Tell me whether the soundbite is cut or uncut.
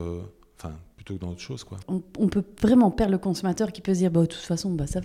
cut